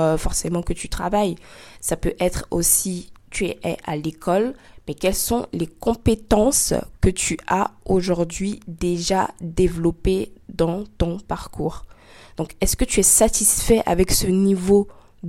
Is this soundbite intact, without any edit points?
yes; 0 cuts

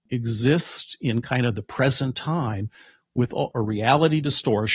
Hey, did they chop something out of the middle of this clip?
yes; 1 cut; at 3.5 s

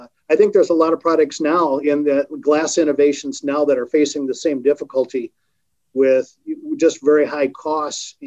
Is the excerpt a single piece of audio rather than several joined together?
yes; 0 cuts

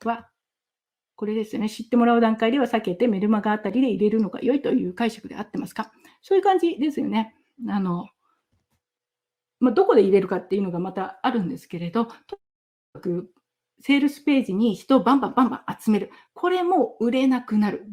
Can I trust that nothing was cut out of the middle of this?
yes; 0 cuts

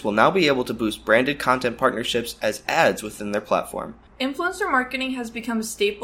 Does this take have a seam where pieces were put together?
yes; 1 cut; at 4.1 s

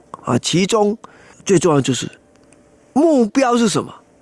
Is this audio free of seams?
yes; 0 cuts

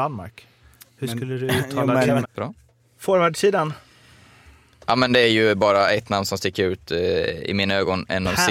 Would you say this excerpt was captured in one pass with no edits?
no; 1 cut; at 2.2 s

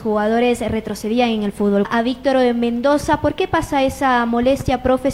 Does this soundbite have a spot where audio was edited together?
yes; 1 cut; at 1.8 s

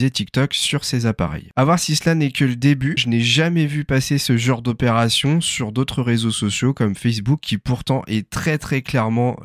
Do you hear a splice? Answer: yes; 1 cut; at 3.0 s

